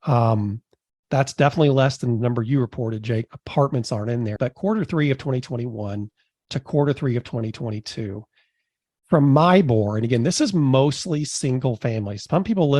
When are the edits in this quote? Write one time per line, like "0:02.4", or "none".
0:03.3
0:04.4